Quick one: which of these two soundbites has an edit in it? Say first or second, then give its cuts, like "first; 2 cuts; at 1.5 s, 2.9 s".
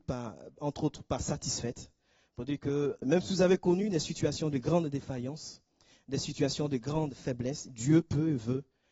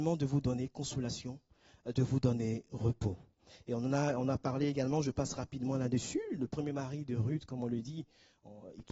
first; 1 cut; at 3.0 s